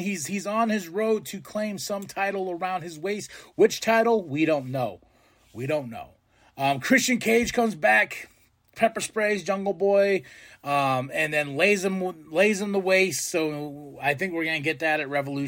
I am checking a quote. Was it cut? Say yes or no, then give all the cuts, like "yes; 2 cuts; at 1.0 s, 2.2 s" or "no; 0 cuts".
no; 0 cuts